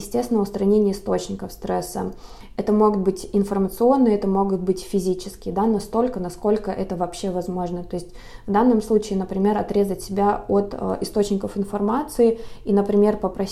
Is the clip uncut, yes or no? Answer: yes